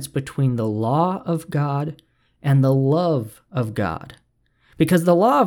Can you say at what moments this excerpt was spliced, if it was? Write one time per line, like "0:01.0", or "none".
none